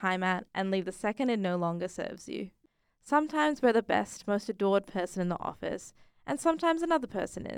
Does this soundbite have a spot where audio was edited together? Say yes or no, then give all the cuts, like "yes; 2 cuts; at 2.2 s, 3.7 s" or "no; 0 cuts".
no; 0 cuts